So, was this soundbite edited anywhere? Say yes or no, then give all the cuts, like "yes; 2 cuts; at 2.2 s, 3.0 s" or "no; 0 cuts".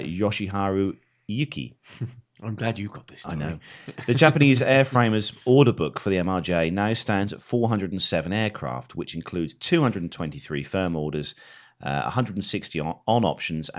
no; 0 cuts